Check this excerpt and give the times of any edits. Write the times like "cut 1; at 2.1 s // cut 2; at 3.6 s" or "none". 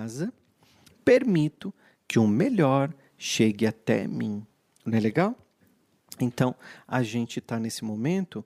none

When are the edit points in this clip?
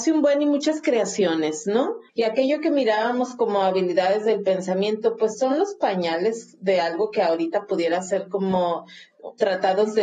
cut 1; at 2.1 s

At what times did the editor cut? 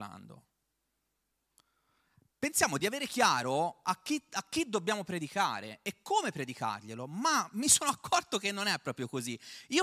none

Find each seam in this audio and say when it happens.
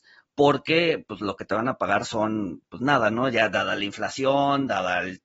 none

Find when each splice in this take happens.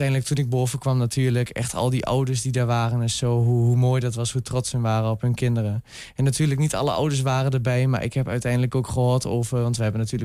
none

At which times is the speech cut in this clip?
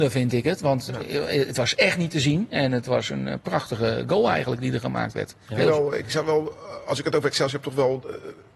none

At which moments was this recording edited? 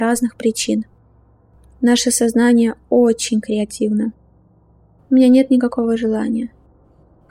cut 1; at 5.0 s

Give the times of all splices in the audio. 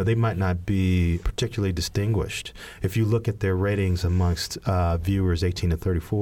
cut 1; at 1.2 s

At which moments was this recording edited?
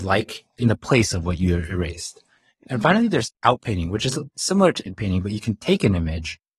none

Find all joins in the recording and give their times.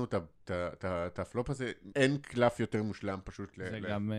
cut 1; at 1.9 s

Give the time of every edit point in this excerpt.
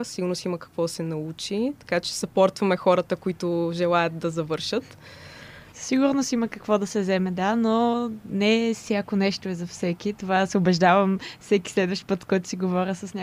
cut 1; at 5.7 s

